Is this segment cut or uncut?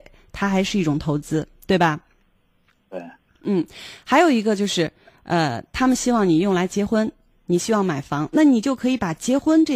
cut